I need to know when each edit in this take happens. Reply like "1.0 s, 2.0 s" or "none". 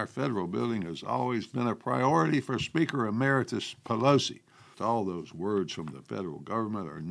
4.7 s

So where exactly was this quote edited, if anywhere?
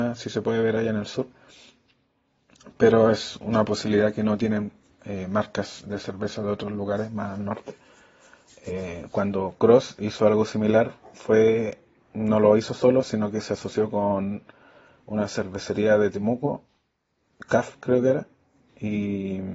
none

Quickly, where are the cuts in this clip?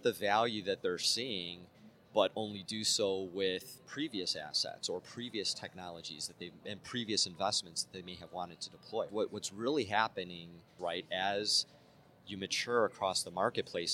9.1 s, 10.8 s

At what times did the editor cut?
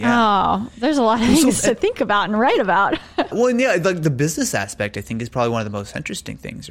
3.3 s

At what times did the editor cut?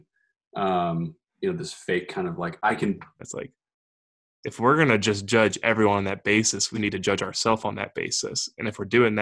3.2 s, 6.7 s

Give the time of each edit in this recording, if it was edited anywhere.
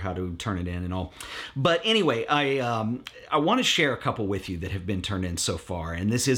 none

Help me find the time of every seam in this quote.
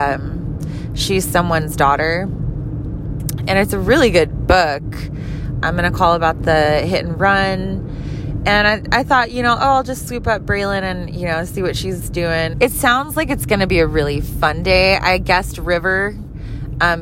5.6 s, 12.5 s

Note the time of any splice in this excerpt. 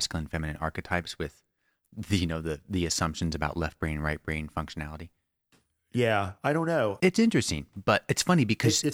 7.0 s

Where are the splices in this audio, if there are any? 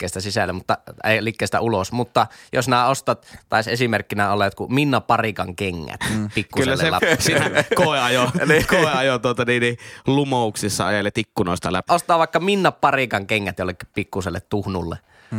7.0 s, 11.9 s

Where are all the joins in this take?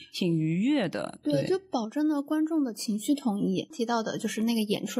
3.7 s

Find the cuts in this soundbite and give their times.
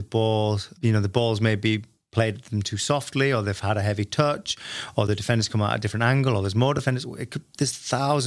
none

